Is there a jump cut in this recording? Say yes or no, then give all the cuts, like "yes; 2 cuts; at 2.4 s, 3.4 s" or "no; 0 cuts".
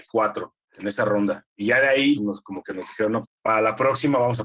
yes; 2 cuts; at 2.2 s, 3.2 s